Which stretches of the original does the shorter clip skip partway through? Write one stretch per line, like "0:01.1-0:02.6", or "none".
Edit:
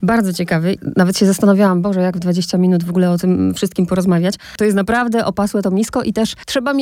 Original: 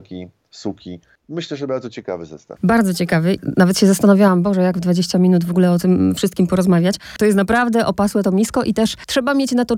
none